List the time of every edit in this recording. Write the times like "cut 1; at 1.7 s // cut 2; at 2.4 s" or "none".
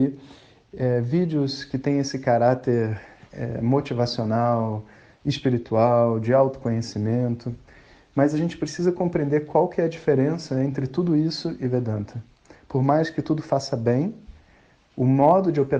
none